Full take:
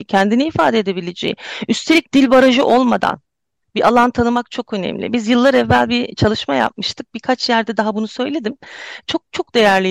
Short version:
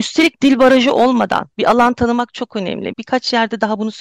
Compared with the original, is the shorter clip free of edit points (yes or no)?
no